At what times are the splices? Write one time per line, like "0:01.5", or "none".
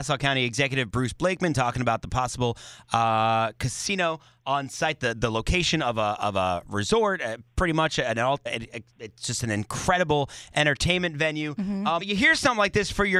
0:08.5
0:12.0